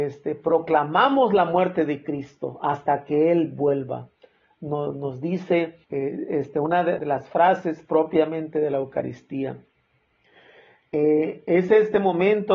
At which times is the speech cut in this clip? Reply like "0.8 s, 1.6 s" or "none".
5.8 s, 7.0 s

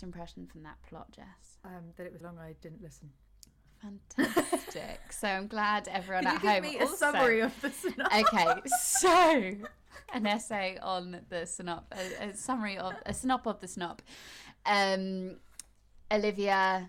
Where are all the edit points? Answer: 2.2 s

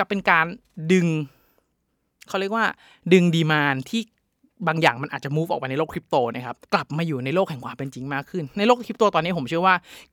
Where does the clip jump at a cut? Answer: 6.6 s

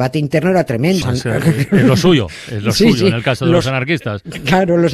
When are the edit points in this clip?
1.0 s

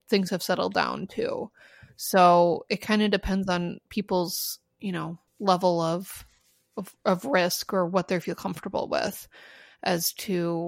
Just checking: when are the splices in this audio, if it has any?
5.3 s

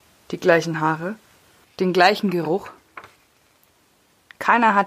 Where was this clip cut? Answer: 1.6 s

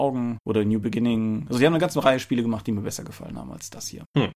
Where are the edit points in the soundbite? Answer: none

